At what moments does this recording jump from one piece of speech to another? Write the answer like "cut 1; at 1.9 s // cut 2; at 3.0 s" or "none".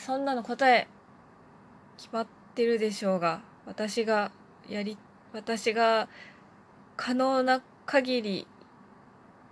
none